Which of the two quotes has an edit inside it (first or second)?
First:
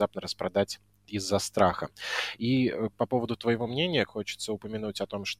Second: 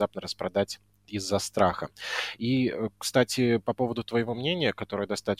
first